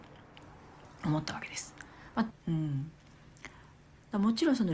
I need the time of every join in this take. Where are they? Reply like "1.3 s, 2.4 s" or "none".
2.3 s